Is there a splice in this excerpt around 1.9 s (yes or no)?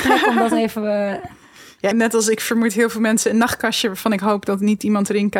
yes